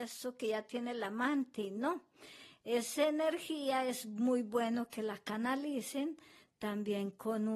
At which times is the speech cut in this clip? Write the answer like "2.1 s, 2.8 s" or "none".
none